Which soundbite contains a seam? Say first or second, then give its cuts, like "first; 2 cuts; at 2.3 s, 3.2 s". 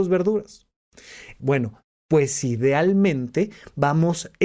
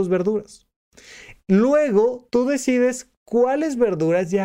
first; 1 cut; at 1.4 s